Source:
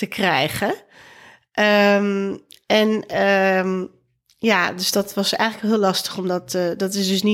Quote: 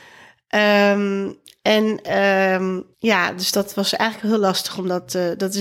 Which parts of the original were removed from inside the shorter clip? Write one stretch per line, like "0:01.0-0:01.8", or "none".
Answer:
0:04.0-0:04.3